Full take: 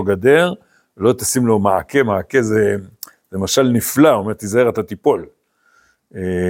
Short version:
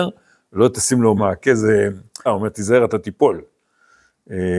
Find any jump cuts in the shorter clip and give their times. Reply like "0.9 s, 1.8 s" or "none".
1.2 s, 2.3 s